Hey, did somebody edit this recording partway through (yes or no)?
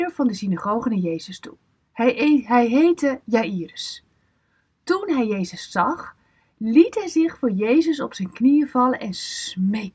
no